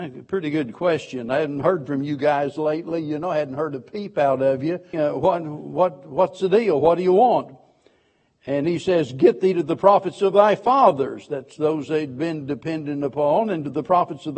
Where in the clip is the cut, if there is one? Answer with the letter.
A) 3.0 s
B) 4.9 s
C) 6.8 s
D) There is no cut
B